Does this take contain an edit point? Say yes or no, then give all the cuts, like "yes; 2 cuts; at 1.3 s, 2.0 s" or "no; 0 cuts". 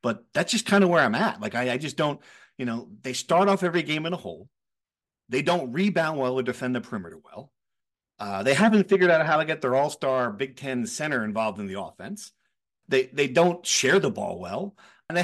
no; 0 cuts